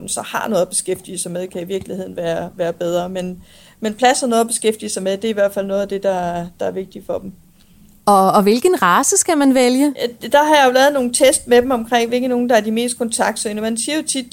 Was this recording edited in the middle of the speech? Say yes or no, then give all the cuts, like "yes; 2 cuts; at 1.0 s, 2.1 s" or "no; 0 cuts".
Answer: no; 0 cuts